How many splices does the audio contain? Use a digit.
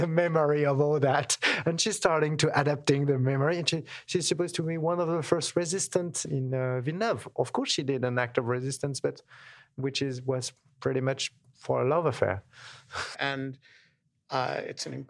1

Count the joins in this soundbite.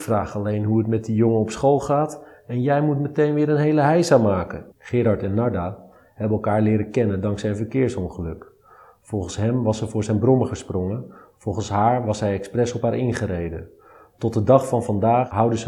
1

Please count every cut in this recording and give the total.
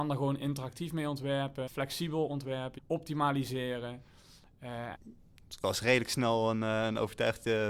3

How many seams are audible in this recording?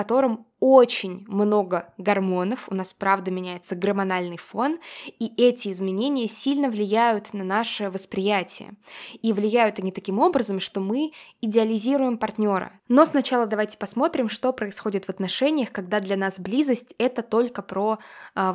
1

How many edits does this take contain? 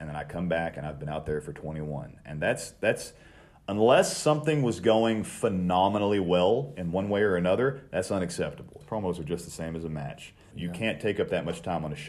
2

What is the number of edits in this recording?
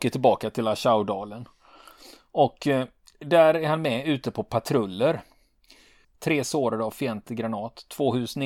1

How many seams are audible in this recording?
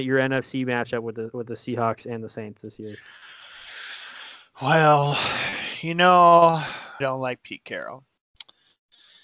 1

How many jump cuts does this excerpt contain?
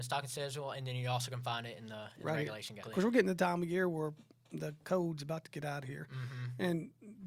1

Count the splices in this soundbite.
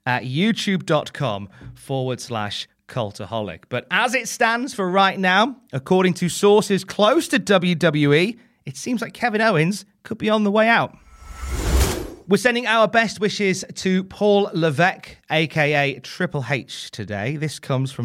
0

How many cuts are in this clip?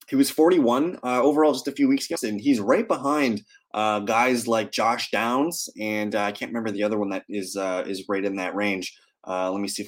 1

